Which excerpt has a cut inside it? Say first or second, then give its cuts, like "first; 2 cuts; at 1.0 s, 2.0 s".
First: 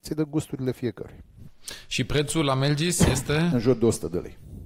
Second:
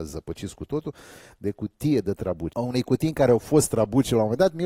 second; 1 cut; at 2.5 s